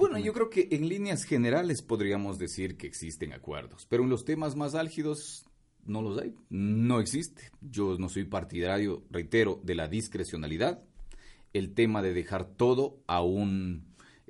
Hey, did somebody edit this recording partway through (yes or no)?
yes